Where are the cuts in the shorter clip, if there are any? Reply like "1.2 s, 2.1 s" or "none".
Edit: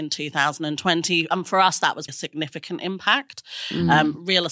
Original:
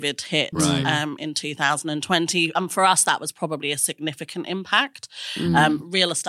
2.1 s